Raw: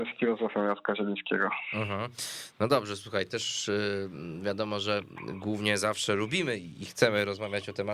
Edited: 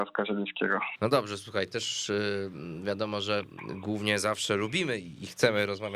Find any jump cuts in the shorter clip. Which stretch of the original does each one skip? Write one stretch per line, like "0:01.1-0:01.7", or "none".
0:01.7-0:02.5